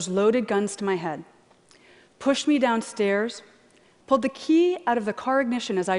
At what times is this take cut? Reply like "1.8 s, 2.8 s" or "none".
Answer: 4.0 s